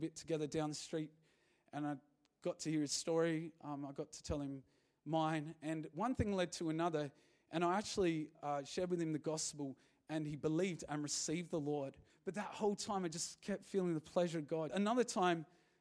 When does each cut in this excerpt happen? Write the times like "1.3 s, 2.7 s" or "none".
12.1 s, 14.7 s

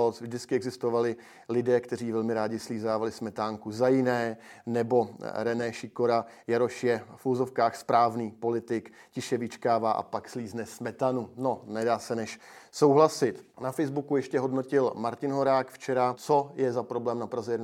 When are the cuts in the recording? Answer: 13.5 s, 16.1 s

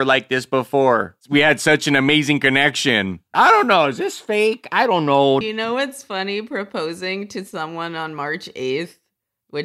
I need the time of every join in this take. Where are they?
3.3 s, 5.4 s

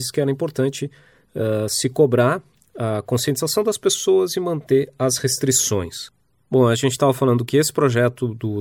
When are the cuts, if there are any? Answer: none

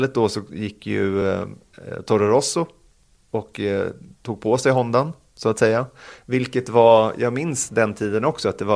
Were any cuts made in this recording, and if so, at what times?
none

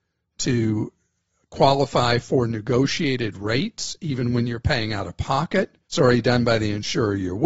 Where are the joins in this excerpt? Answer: 5.8 s

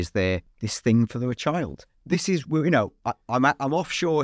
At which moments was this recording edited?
none

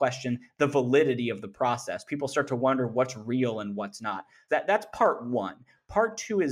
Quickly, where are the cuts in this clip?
4.5 s

